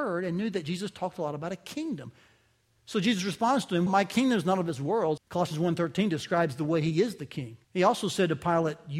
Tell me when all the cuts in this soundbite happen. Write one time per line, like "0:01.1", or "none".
0:03.9
0:05.2
0:07.6